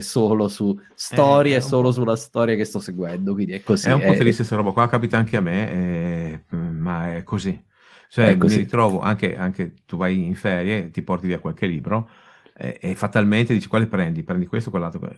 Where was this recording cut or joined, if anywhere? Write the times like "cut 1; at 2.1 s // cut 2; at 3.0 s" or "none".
none